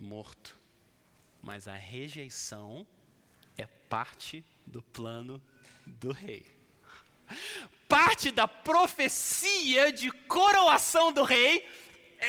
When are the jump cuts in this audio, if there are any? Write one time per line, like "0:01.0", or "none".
none